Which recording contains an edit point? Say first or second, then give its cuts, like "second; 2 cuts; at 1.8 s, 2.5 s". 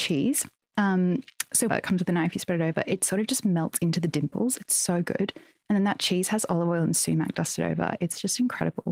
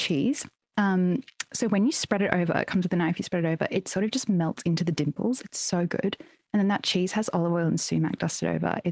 first; 1 cut; at 1.7 s